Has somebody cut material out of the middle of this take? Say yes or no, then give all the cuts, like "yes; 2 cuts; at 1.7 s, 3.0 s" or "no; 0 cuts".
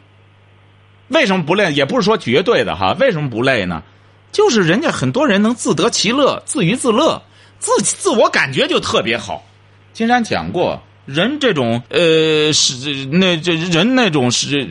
yes; 1 cut; at 11.9 s